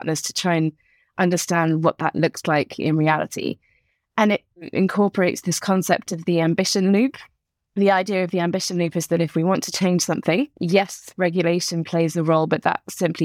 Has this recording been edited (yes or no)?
no